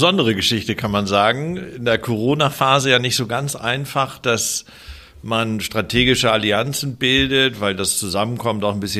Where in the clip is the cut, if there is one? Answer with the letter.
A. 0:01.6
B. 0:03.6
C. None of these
C